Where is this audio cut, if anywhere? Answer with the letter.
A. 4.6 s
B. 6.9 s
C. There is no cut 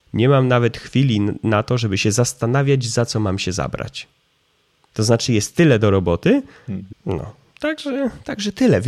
B